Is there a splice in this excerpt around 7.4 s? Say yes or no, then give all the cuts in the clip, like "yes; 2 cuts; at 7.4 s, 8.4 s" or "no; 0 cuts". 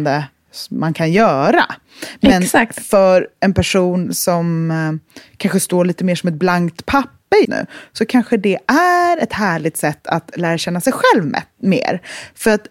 yes; 1 cut; at 7.4 s